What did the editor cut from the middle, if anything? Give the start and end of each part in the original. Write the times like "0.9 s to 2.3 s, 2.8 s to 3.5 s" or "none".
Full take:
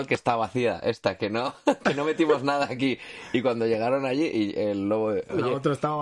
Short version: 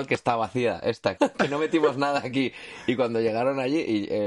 1.2 s to 1.6 s